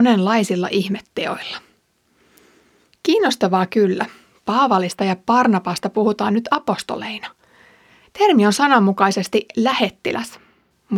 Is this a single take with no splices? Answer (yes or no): yes